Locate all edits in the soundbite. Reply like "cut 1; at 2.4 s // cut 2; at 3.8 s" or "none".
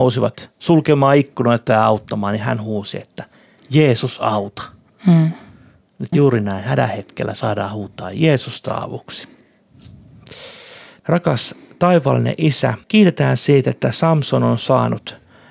cut 1; at 6.1 s // cut 2; at 11.0 s // cut 3; at 12.8 s